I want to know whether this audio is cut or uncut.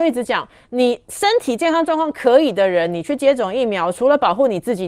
uncut